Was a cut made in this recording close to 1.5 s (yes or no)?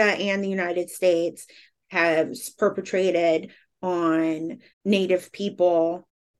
no